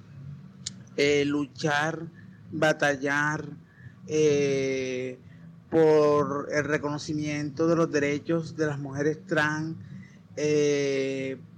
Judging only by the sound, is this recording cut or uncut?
uncut